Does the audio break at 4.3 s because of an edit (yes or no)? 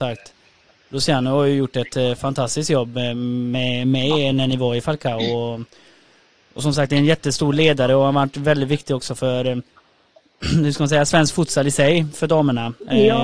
no